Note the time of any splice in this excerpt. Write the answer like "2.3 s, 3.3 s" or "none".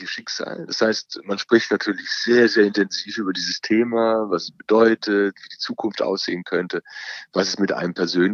none